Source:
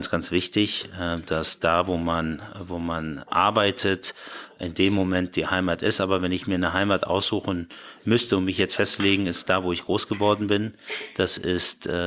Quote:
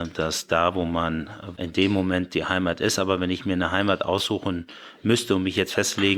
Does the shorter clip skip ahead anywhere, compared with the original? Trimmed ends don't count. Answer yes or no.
yes